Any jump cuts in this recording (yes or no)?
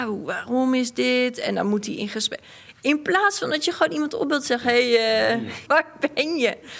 yes